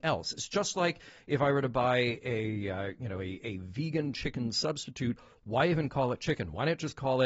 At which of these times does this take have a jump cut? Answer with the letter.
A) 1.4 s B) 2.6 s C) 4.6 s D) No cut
D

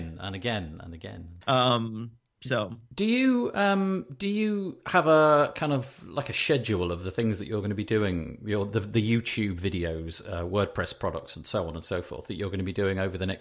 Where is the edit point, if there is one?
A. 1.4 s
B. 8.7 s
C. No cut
A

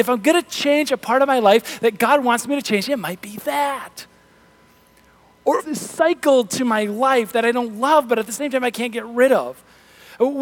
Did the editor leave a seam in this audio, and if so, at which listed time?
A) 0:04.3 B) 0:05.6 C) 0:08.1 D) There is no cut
B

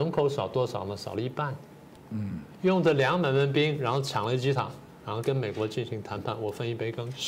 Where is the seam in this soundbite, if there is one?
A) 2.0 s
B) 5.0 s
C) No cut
A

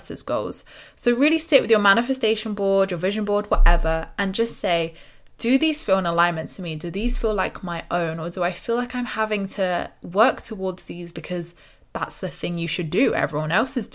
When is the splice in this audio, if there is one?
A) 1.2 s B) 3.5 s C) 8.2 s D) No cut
D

